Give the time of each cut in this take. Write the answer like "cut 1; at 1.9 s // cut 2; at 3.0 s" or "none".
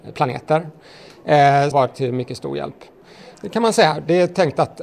cut 1; at 1.7 s // cut 2; at 3.3 s